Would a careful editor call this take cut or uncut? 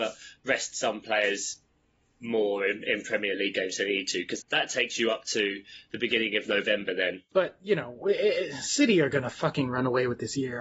cut